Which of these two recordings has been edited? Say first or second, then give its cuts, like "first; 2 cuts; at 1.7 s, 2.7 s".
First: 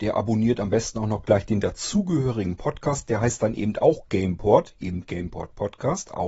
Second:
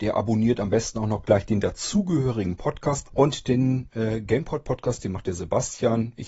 second; 1 cut; at 3.0 s